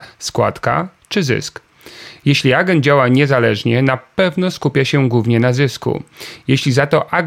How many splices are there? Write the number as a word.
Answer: zero